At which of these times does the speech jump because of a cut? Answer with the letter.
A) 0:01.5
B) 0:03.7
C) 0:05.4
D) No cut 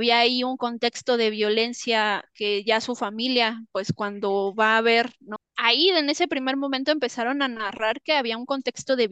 C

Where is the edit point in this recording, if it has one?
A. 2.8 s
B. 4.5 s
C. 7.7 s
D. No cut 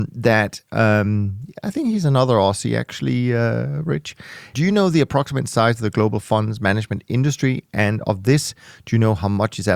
B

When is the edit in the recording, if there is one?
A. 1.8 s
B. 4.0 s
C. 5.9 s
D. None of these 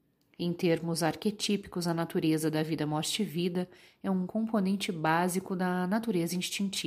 D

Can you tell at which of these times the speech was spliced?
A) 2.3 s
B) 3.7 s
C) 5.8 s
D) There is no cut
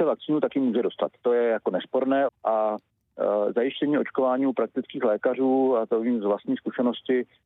A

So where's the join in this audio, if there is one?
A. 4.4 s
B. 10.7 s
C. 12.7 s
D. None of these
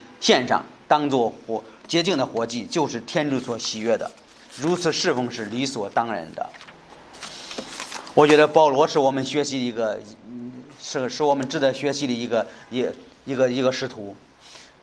D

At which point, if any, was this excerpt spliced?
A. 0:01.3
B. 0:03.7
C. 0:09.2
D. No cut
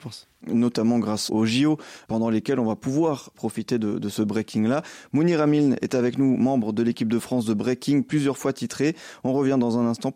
A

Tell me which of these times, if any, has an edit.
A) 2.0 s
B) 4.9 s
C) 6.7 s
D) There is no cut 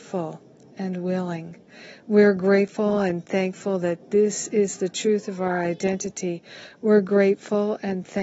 D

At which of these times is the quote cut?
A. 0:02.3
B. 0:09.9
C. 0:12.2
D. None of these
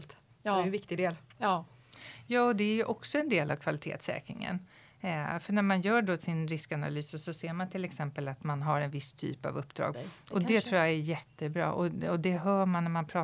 B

